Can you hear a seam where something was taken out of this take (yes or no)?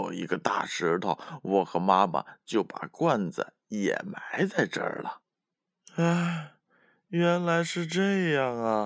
no